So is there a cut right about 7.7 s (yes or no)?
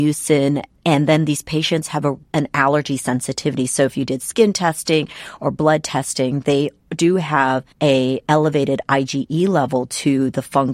yes